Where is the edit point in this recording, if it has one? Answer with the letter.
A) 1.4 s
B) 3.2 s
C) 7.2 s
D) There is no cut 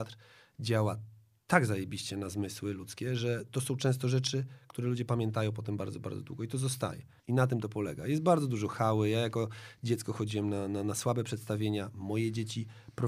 C